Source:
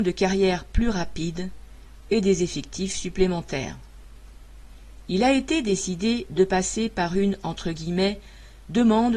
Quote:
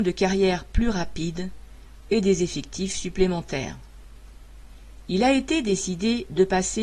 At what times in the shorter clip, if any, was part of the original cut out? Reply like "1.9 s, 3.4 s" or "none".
none